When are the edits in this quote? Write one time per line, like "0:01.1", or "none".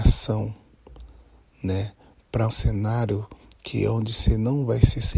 0:02.5